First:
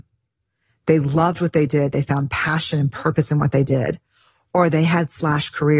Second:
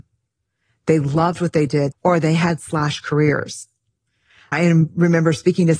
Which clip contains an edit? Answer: second; 1 cut; at 1.9 s

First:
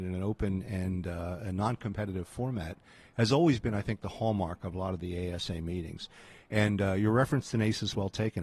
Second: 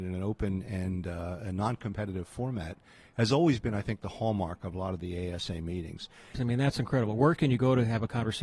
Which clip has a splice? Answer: second; 1 cut; at 6.3 s

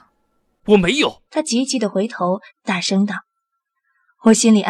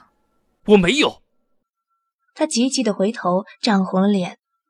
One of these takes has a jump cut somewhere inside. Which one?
first; 2 cuts; at 1.3 s, 2.5 s

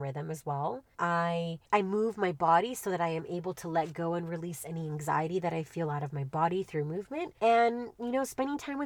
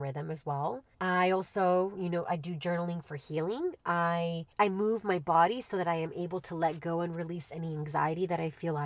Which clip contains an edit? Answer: first; 2 cuts; at 0.9 s, 7.4 s

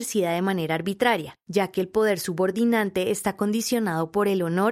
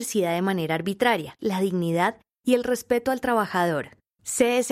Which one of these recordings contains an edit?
second; 1 cut; at 1.4 s

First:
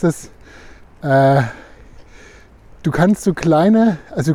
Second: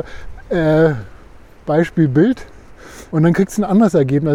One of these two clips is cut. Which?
second; 1 cut; at 3.1 s

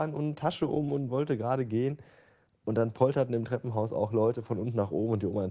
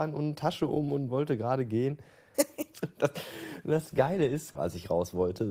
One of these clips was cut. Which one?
second; 2 cuts; at 2.3 s, 4.5 s

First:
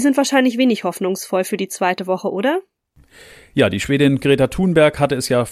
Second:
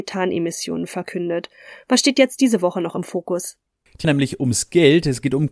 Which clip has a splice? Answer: second; 1 cut; at 4.0 s

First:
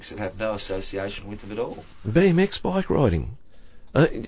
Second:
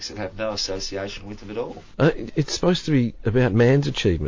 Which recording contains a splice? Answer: second; 1 cut; at 1.9 s

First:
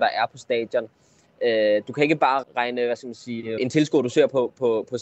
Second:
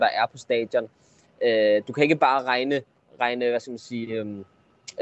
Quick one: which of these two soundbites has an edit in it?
first; 2 cuts; at 2.4 s, 3.6 s

